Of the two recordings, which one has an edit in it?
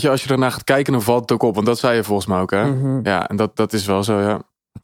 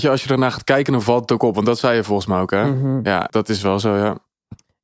second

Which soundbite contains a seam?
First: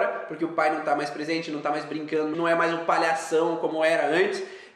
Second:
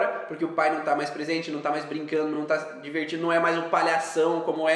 first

